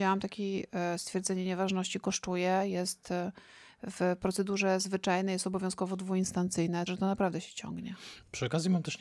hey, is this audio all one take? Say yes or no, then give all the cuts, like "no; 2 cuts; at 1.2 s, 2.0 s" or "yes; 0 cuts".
no; 1 cut; at 6.9 s